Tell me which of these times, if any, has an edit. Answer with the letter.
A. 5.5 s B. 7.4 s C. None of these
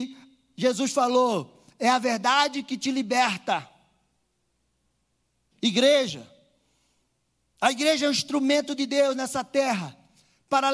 A